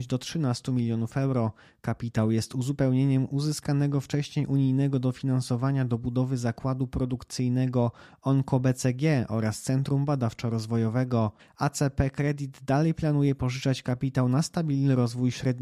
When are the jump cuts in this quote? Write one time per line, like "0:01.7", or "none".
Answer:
0:11.4